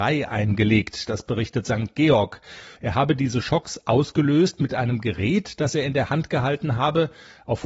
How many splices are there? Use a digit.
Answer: 1